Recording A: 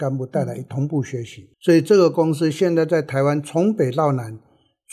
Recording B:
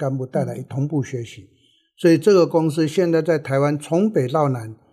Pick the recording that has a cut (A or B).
A